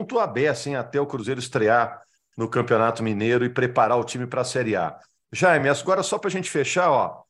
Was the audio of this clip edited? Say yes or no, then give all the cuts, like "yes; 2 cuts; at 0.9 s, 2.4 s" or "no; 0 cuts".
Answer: no; 0 cuts